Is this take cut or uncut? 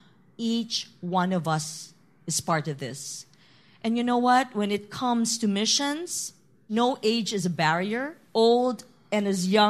cut